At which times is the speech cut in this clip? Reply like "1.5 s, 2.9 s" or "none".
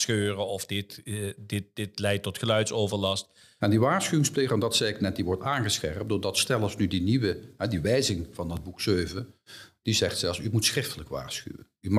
3.6 s